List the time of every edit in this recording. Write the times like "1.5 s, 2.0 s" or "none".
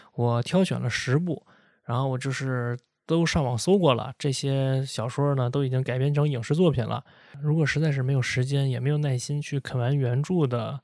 none